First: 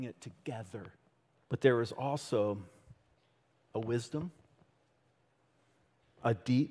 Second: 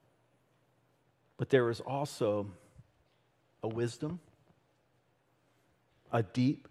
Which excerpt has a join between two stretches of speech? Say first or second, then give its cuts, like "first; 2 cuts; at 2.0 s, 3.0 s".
first; 1 cut; at 1.3 s